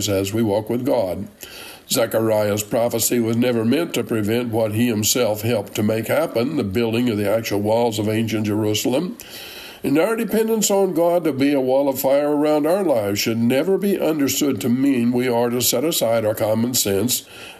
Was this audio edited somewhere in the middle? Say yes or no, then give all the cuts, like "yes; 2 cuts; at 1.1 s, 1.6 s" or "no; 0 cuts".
no; 0 cuts